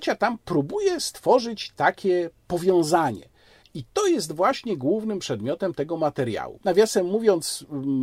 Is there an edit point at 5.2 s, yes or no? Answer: no